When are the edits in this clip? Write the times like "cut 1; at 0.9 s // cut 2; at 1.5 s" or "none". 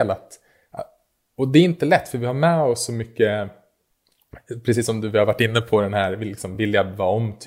none